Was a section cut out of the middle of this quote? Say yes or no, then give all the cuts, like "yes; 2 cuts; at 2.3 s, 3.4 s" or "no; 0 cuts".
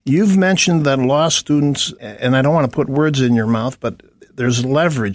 yes; 1 cut; at 1.9 s